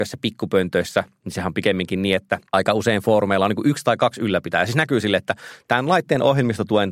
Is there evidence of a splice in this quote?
yes; 1 cut; at 2.5 s

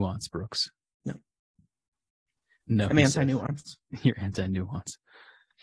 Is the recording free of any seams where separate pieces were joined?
no; 1 cut; at 1.0 s

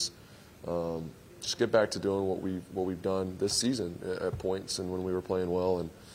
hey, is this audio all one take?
yes; 0 cuts

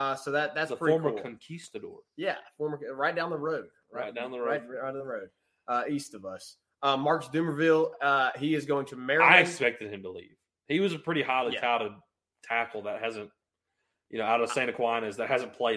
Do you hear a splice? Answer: no; 0 cuts

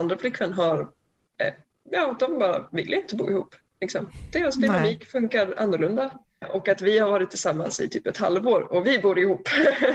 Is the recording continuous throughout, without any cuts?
no; 1 cut; at 6.4 s

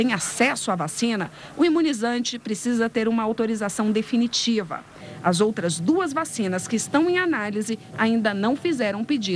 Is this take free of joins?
no; 1 cut; at 7.9 s

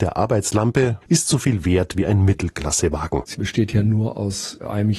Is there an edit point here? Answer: yes; 1 cut; at 1.0 s

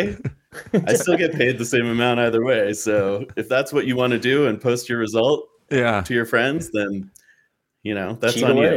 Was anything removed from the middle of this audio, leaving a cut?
no; 0 cuts

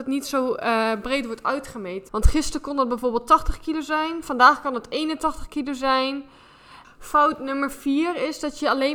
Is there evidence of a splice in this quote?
yes; 2 cuts; at 2.1 s, 6.8 s

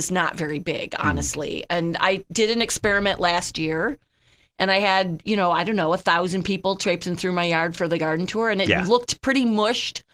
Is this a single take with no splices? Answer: yes; 0 cuts

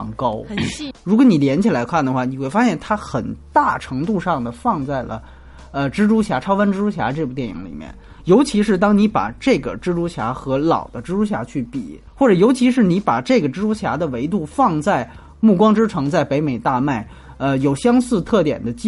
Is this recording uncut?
no; 2 cuts; at 0.9 s, 12.1 s

